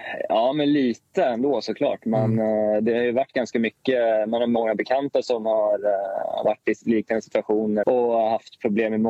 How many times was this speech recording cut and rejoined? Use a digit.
1